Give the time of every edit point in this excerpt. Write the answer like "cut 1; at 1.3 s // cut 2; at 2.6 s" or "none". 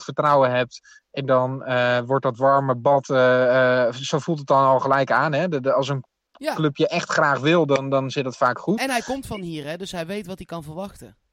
none